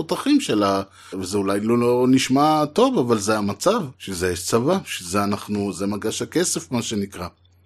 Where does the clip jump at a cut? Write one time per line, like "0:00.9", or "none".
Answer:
0:01.1
0:03.9